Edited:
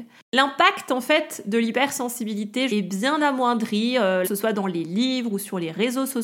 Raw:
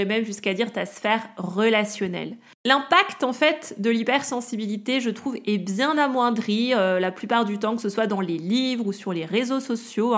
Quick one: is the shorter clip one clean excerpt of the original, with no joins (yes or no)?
no